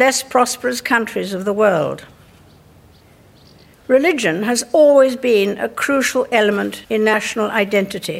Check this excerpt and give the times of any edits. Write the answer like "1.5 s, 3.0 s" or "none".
3.7 s, 6.8 s